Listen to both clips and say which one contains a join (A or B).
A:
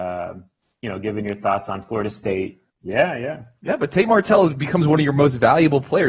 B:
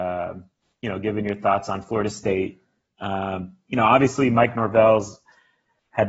A